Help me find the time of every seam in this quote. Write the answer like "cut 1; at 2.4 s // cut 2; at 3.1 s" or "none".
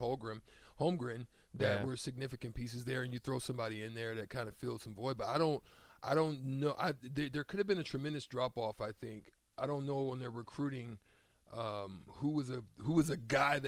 none